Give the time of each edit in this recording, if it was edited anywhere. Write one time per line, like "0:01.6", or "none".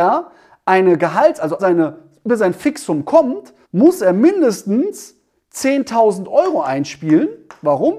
0:01.6
0:03.6